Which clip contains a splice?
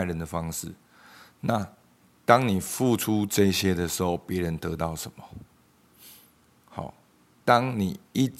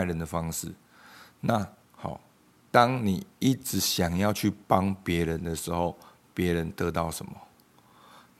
second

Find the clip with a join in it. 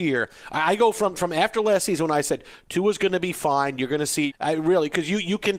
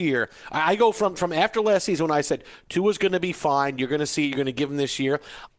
first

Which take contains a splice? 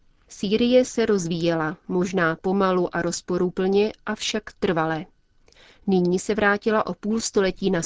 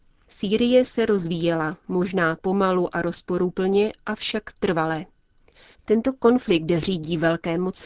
second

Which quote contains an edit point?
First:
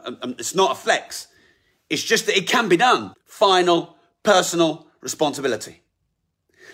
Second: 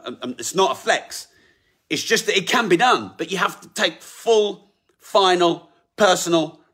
first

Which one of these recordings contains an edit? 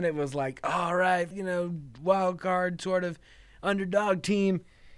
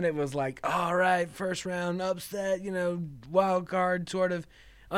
first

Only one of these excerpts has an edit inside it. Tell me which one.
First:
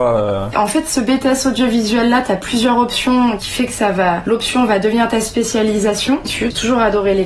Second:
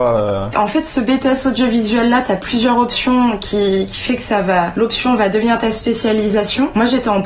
first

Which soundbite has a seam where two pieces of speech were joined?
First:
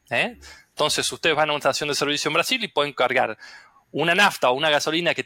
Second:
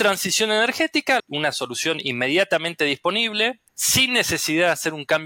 second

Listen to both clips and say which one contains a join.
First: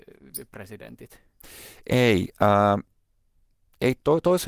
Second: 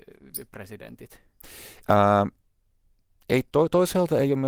second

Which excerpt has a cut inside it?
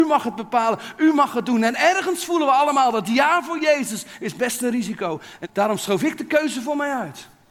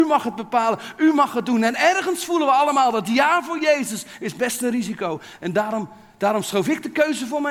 first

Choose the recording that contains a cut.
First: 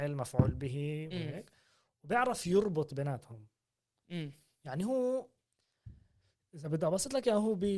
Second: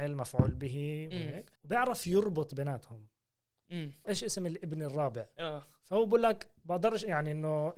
second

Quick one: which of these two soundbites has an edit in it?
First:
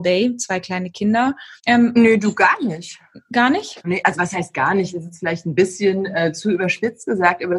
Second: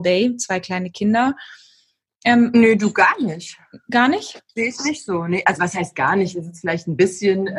first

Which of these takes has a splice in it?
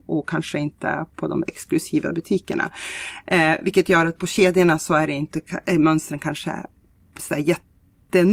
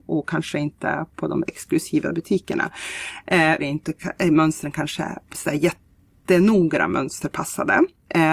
second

